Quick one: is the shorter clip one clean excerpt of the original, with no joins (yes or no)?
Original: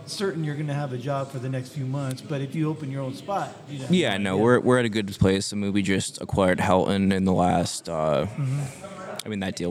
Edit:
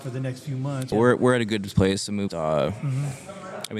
no